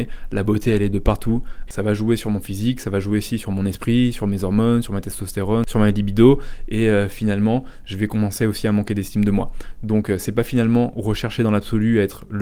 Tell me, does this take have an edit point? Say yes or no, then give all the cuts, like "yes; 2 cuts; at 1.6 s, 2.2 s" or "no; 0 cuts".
yes; 1 cut; at 1.7 s